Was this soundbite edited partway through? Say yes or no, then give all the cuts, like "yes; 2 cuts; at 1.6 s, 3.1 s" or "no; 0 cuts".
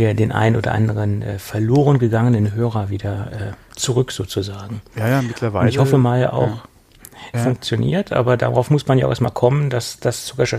yes; 1 cut; at 7.3 s